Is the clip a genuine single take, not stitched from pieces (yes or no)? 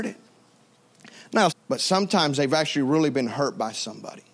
no